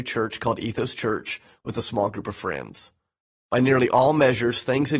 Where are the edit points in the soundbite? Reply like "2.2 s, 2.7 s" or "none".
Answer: none